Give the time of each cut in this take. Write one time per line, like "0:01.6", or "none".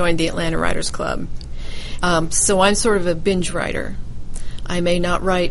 0:02.0